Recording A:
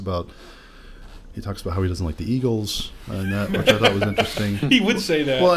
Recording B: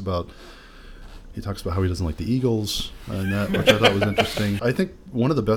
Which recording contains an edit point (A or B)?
B